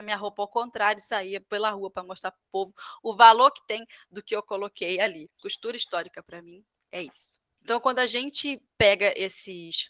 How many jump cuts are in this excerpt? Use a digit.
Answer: 2